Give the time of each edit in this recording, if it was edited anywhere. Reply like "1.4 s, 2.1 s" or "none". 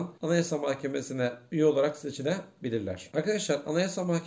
none